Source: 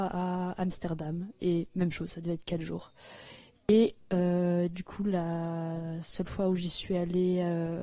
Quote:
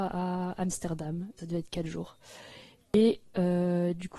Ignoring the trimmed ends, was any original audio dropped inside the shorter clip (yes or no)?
yes